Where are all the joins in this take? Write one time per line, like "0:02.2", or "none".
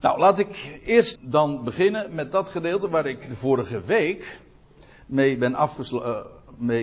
0:01.1